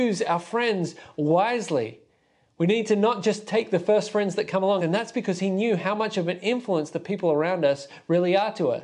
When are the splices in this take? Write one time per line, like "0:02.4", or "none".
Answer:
0:04.8

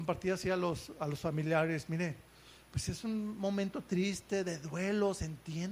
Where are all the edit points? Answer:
none

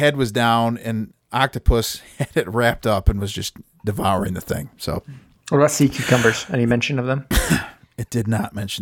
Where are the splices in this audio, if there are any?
none

